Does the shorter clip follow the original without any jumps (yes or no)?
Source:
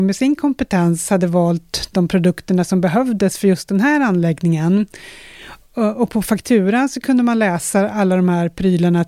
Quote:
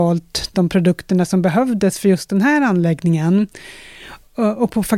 yes